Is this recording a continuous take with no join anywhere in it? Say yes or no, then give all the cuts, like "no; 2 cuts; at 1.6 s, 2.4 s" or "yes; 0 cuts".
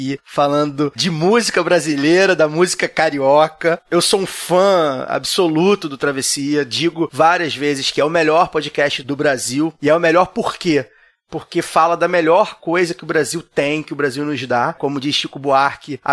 yes; 0 cuts